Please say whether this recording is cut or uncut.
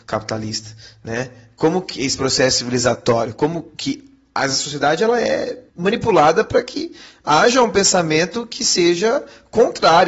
cut